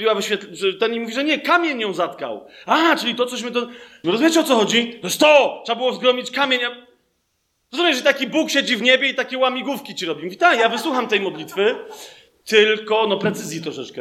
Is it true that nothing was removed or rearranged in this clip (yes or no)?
no